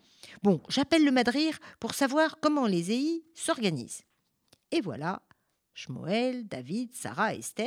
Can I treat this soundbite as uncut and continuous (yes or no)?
yes